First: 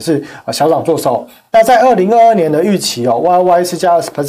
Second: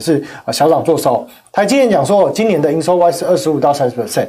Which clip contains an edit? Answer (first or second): second